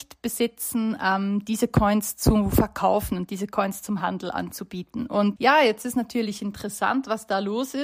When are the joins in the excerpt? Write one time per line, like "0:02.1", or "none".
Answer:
0:05.4